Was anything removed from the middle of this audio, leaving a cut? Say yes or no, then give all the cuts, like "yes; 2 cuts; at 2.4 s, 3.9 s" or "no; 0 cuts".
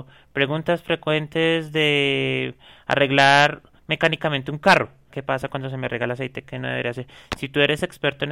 yes; 2 cuts; at 5.1 s, 6.4 s